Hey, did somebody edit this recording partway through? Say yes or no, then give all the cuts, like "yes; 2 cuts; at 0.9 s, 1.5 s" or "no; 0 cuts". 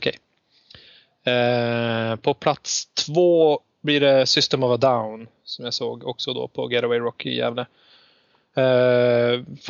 no; 0 cuts